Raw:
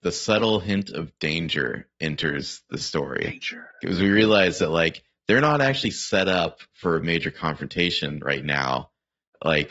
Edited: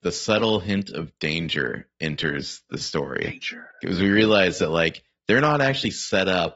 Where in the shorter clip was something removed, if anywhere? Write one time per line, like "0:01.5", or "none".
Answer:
none